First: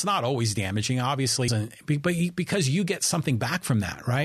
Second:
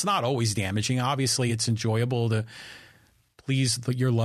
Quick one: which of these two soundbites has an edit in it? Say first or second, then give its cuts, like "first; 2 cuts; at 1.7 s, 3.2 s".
first; 1 cut; at 1.5 s